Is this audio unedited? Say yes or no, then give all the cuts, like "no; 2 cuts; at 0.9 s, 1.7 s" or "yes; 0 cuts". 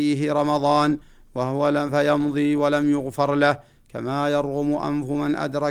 yes; 0 cuts